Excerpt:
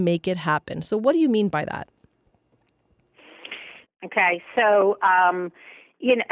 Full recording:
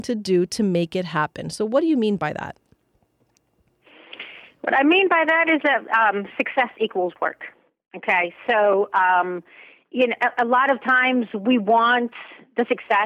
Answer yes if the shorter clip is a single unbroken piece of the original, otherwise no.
no